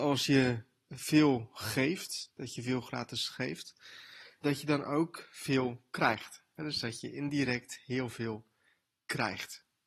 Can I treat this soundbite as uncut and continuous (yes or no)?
no